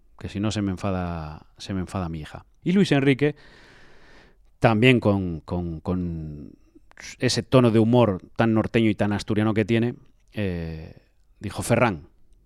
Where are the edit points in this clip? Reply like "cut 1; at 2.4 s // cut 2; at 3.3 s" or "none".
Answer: cut 1; at 2.6 s